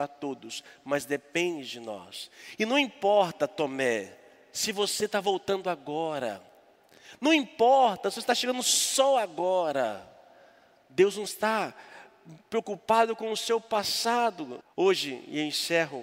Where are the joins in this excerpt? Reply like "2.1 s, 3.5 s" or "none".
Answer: 14.6 s